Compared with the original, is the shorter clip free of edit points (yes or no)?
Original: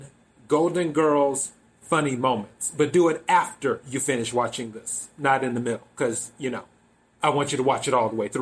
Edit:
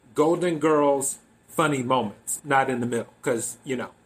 no